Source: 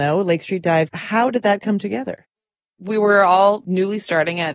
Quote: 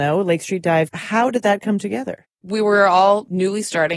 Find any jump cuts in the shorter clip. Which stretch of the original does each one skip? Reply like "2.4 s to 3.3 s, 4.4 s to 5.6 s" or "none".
2.3 s to 2.7 s